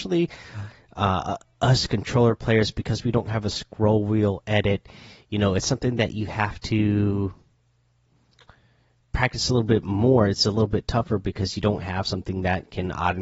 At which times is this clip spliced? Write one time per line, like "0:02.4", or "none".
none